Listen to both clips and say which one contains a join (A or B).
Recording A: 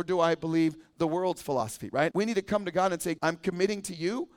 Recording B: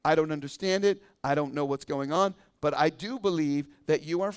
A